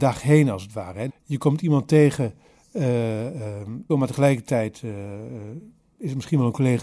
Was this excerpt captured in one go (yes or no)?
no